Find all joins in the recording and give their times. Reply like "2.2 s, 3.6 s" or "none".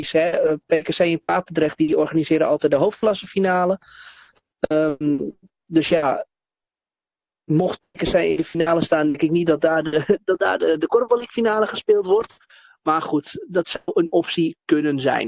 none